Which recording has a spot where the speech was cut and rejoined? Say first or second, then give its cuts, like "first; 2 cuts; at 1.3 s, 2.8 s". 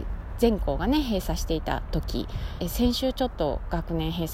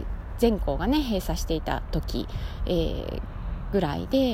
first; 1 cut; at 2.6 s